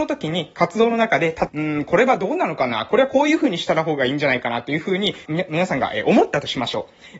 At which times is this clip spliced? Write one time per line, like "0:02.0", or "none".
0:01.5
0:05.3